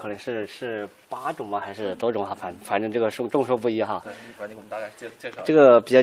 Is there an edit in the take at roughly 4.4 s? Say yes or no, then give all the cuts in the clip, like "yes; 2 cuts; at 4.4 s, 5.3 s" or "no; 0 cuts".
yes; 1 cut; at 4.4 s